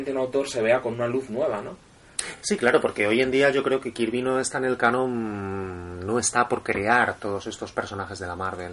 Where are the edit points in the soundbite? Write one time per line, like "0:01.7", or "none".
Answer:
none